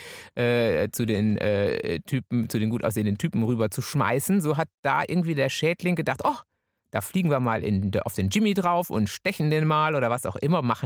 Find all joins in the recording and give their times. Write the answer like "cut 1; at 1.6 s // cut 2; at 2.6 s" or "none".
none